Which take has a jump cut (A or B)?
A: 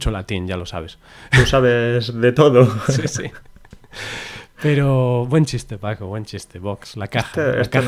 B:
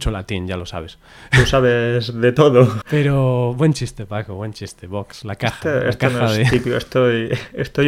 B